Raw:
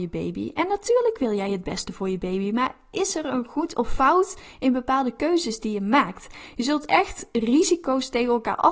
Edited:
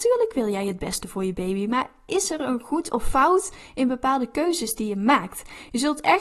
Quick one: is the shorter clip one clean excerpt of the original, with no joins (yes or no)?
yes